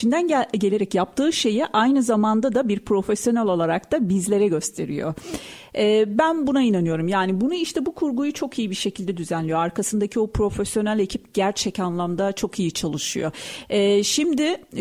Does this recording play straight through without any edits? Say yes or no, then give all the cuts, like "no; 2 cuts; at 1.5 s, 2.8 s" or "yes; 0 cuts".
yes; 0 cuts